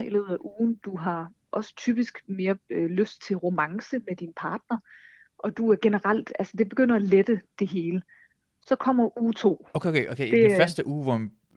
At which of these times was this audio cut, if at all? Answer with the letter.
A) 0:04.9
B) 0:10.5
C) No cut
C